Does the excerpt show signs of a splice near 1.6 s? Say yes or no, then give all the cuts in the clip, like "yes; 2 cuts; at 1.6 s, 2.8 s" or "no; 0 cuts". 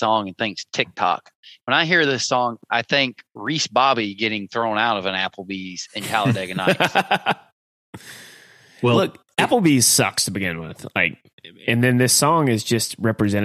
no; 0 cuts